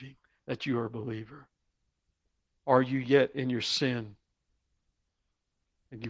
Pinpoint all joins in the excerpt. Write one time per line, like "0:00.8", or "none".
none